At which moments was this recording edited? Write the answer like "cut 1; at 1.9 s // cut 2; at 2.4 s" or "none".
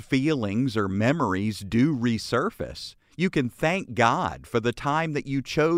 none